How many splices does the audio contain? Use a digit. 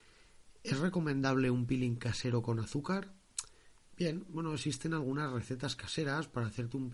0